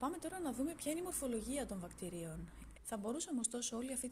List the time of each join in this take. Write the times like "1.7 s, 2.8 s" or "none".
2.7 s